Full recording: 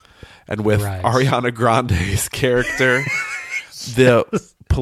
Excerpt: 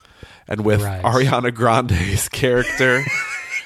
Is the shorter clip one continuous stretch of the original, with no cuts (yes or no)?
yes